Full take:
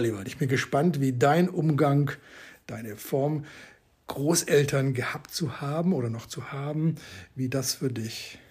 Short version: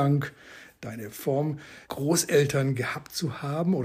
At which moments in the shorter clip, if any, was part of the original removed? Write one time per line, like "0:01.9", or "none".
0:01.8